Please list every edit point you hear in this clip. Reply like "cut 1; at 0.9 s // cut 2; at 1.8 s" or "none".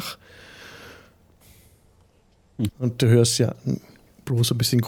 cut 1; at 2.7 s